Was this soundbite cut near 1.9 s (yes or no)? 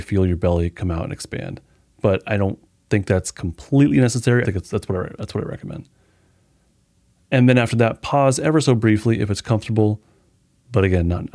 no